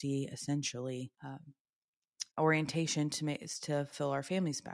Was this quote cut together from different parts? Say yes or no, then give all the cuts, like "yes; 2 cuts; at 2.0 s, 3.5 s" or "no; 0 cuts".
yes; 2 cuts; at 1.1 s, 2.3 s